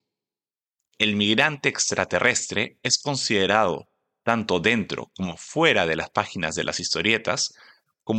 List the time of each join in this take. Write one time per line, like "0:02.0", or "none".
none